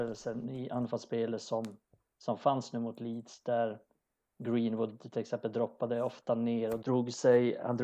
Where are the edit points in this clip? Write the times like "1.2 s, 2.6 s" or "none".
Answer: 6.8 s